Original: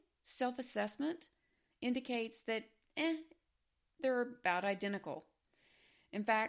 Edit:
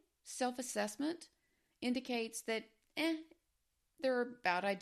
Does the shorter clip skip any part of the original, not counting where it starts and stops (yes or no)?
no